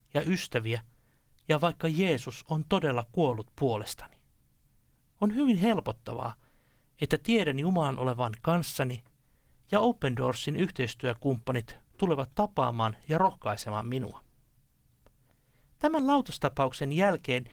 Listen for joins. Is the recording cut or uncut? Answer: uncut